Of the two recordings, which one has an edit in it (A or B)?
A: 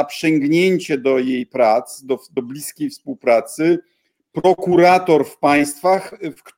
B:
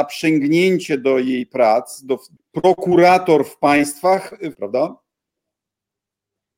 B